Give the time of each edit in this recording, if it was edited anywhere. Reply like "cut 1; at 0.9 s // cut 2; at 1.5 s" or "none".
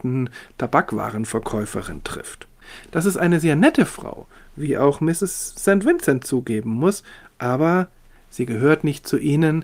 none